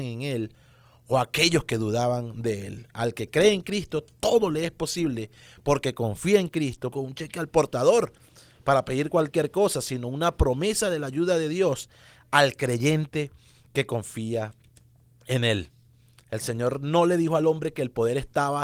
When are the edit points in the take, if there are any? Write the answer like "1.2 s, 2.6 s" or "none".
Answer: 6.9 s